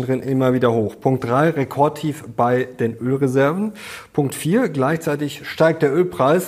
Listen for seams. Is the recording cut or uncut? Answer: uncut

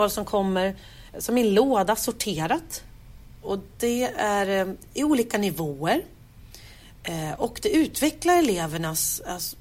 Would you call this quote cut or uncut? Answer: cut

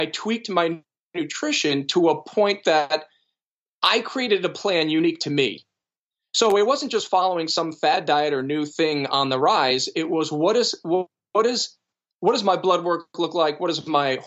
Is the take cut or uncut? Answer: uncut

